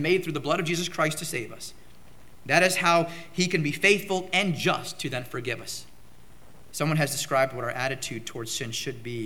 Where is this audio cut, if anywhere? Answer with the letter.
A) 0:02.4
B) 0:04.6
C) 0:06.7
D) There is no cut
C